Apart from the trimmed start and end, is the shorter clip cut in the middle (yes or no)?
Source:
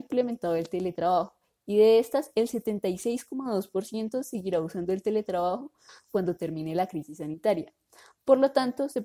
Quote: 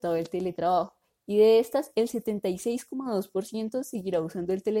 no